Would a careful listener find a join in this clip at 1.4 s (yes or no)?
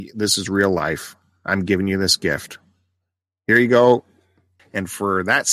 no